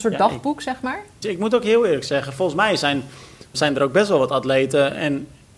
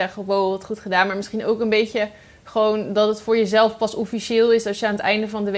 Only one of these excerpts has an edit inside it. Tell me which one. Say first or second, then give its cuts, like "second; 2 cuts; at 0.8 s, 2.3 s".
first; 2 cuts; at 1.2 s, 3.5 s